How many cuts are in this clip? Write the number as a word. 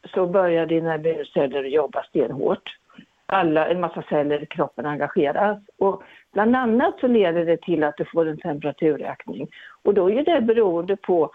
zero